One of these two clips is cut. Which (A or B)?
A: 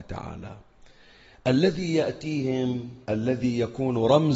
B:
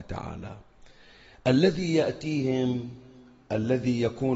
A